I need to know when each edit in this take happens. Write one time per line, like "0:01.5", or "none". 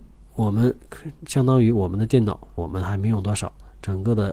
0:02.6